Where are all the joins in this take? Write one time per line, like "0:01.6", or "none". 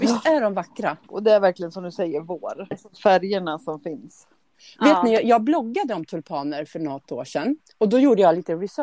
0:01.1
0:02.7